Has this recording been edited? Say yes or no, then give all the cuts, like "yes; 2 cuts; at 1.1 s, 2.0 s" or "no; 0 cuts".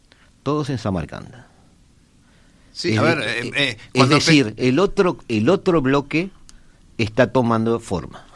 no; 0 cuts